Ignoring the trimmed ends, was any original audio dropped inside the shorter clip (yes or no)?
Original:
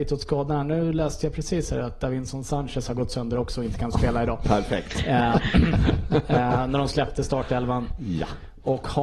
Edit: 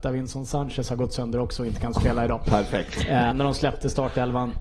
yes